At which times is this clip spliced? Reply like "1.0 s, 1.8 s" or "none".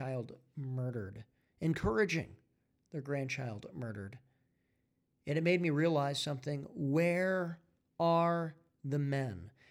none